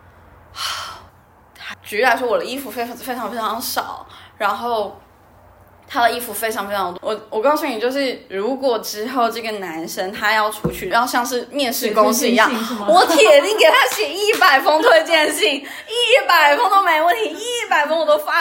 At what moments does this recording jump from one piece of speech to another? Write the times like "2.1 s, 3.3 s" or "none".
1.7 s, 7.0 s, 10.9 s